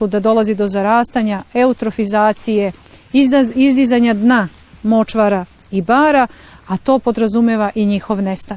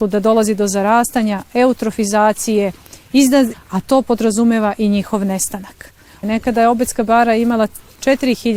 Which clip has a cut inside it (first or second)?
second